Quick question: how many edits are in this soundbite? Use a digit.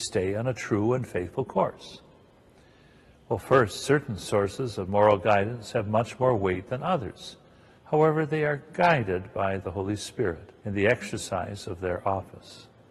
2